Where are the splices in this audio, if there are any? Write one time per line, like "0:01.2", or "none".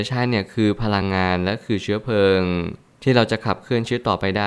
none